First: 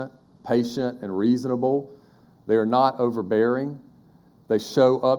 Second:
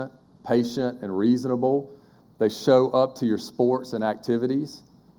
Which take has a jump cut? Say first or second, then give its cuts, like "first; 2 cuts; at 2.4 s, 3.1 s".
second; 1 cut; at 2.2 s